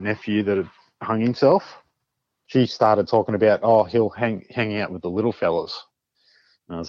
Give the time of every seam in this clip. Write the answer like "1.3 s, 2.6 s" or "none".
2.4 s